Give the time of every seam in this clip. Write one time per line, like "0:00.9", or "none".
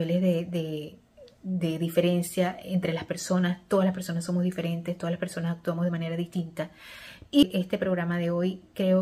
0:07.2